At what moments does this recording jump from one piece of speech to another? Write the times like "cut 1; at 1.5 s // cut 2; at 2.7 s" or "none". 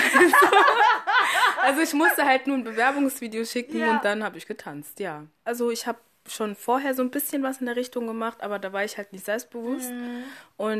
cut 1; at 5.5 s